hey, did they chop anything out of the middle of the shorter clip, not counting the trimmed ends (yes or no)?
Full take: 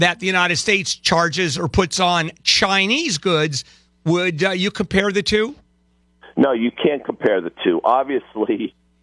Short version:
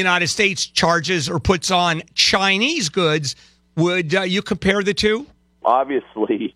yes